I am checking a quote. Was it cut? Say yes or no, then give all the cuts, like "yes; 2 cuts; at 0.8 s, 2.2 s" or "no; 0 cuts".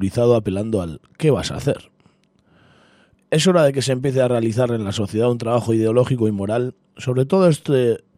no; 0 cuts